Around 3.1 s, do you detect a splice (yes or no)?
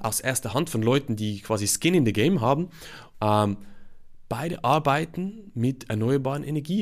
yes